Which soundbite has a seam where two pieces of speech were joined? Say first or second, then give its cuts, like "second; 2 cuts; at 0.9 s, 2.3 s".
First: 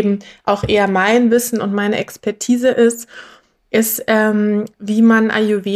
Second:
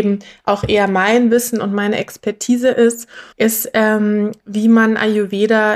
second; 1 cut; at 3.3 s